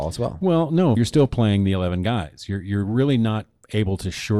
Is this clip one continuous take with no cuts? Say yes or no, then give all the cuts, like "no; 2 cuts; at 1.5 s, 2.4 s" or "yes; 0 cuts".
no; 1 cut; at 1.0 s